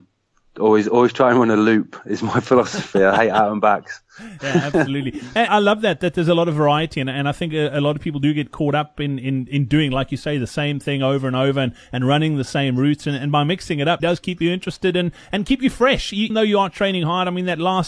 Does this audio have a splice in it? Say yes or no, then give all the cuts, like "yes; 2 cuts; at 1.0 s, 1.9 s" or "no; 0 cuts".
yes; 3 cuts; at 5.5 s, 14.0 s, 16.3 s